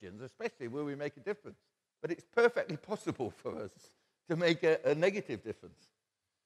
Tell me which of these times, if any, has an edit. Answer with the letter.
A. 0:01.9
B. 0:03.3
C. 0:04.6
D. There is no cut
A